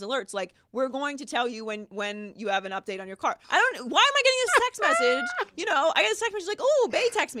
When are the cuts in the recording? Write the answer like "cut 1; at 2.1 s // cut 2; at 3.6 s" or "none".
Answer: cut 1; at 3.4 s

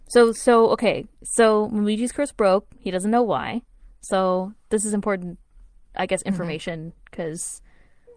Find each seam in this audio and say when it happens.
none

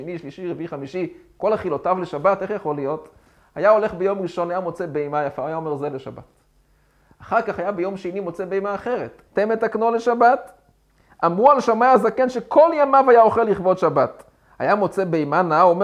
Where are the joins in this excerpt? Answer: cut 1; at 9.3 s

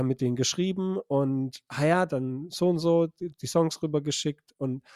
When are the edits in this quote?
none

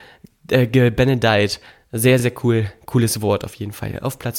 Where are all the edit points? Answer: none

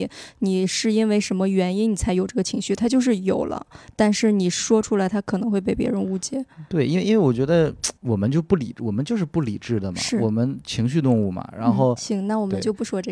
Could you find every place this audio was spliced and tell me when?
cut 1; at 8.0 s // cut 2; at 12.0 s

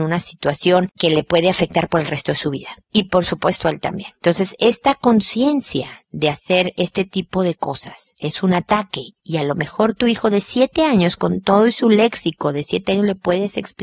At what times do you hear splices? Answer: none

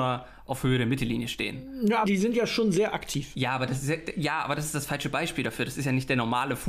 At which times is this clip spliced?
cut 1; at 2.0 s

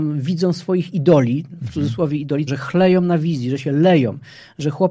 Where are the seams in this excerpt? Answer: cut 1; at 2.5 s

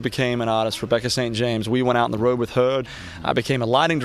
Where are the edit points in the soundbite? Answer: cut 1; at 2.8 s

